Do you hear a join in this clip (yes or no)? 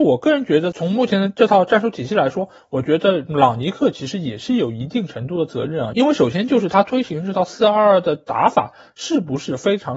no